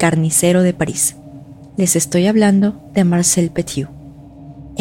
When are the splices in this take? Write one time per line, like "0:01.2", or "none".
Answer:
none